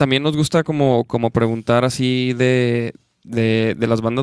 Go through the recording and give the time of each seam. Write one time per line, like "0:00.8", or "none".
none